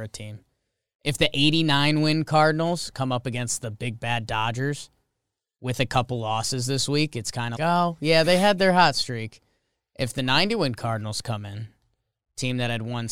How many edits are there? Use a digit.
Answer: 1